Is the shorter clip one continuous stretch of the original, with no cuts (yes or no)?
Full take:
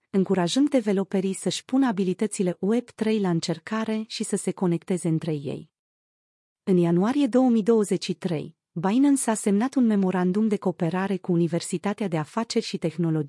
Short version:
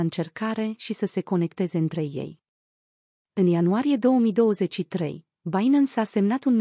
yes